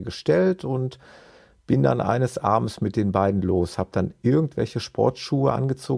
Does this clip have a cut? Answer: no; 0 cuts

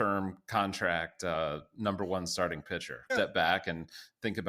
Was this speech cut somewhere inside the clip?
yes; 1 cut; at 3.1 s

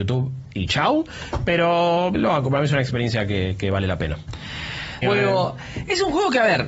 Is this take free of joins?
no; 2 cuts; at 2.1 s, 5.0 s

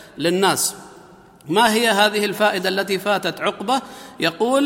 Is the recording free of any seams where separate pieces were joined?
yes; 0 cuts

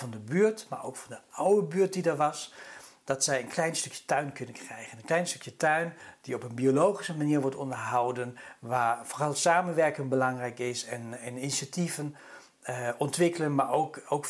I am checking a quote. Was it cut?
no; 0 cuts

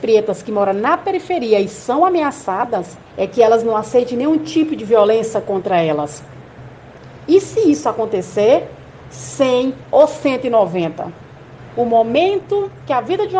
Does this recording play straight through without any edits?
no; 3 cuts; at 3.1 s, 7.3 s, 9.1 s

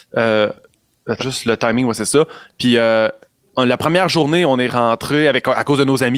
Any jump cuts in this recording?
yes; 1 cut; at 1.2 s

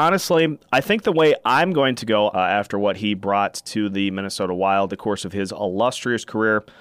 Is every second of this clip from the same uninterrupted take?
no; 2 cuts; at 2.3 s, 4.9 s

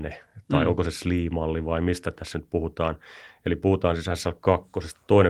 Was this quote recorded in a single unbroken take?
yes; 0 cuts

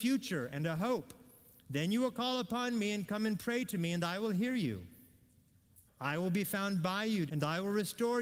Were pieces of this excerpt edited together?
yes; 2 cuts; at 5.9 s, 7.3 s

